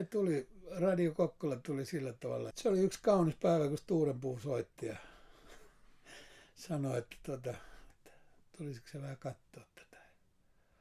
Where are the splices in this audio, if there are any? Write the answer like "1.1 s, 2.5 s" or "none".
2.5 s, 7.9 s